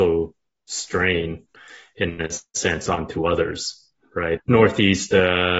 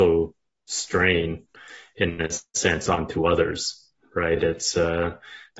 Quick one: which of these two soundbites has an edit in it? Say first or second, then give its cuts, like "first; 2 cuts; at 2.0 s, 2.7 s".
first; 1 cut; at 4.4 s